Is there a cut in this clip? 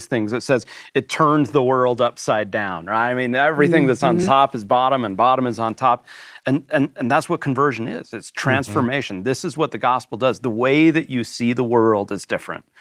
no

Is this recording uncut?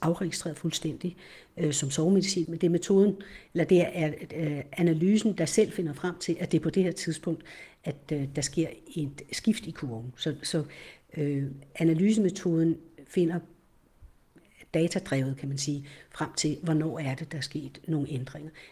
no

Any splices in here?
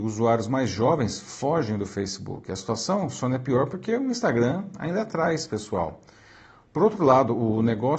no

